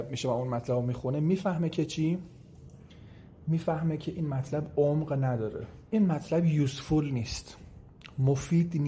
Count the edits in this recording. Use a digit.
1